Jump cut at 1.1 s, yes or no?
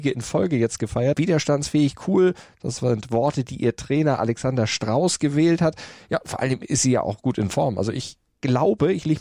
yes